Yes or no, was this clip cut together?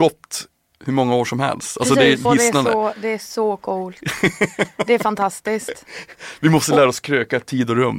yes